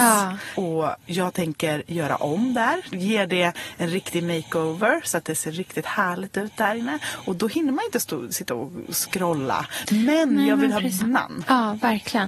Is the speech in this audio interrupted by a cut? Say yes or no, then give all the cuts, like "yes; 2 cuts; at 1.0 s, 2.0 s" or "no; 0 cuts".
yes; 2 cuts; at 2.9 s, 11.0 s